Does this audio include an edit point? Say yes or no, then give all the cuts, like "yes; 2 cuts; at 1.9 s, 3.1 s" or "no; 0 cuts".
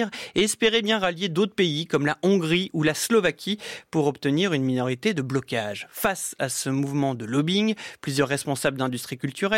no; 0 cuts